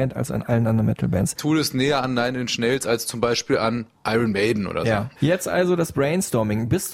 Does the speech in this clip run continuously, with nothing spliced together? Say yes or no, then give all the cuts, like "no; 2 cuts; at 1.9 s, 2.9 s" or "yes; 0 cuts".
yes; 0 cuts